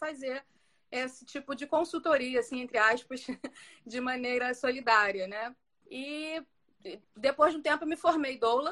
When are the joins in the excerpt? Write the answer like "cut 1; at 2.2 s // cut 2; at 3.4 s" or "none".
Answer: cut 1; at 5.8 s // cut 2; at 7.0 s